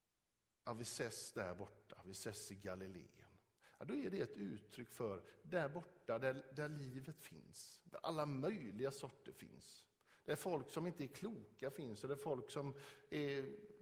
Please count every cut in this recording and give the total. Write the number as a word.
zero